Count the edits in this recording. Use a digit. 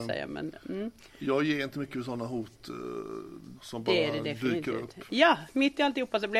2